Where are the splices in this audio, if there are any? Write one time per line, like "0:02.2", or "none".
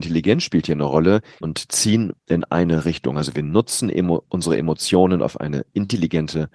0:01.4